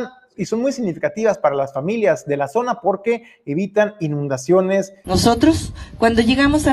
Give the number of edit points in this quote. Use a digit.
1